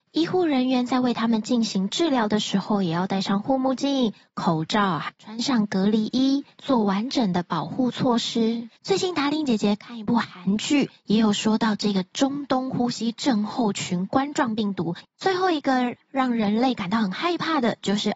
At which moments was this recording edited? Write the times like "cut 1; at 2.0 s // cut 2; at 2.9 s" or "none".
cut 1; at 8.8 s // cut 2; at 15.0 s